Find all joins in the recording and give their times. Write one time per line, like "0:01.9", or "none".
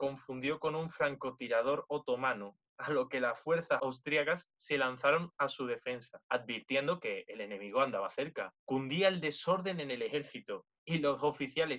none